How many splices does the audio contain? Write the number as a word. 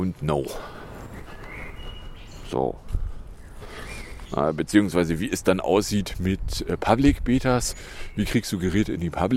zero